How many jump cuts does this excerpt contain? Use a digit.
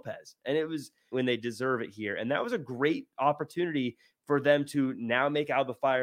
1